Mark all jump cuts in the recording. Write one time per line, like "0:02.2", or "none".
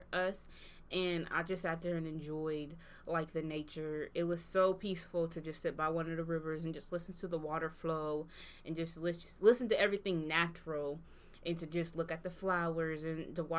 none